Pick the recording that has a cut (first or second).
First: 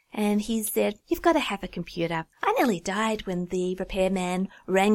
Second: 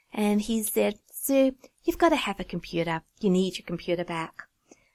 first